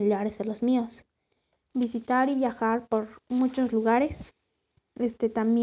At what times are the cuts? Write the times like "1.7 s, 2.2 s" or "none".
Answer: none